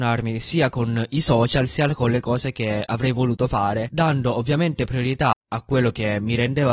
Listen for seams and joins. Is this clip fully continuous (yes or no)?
no